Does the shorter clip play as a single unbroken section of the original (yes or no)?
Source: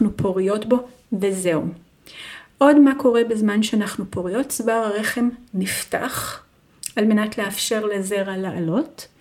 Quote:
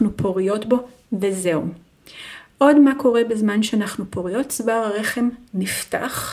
yes